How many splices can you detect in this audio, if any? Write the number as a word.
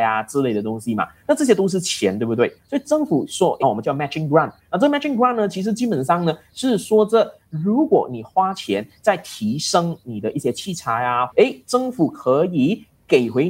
three